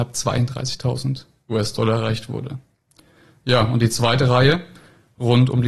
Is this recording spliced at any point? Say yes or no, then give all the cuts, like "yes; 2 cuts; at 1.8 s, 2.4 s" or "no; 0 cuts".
no; 0 cuts